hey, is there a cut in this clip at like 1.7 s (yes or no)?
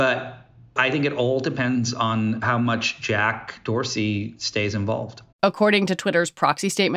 no